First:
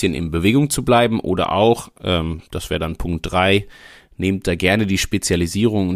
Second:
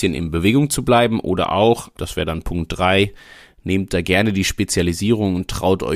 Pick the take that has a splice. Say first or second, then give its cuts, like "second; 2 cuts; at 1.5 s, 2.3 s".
second; 1 cut; at 1.9 s